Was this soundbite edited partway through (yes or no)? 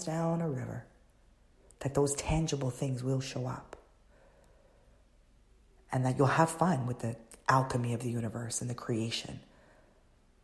no